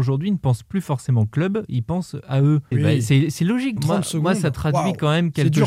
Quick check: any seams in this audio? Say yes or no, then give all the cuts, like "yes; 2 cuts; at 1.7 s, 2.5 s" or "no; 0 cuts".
yes; 2 cuts; at 2.7 s, 3.8 s